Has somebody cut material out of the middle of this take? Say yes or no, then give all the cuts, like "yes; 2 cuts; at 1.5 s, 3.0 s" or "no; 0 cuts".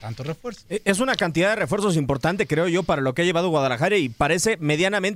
no; 0 cuts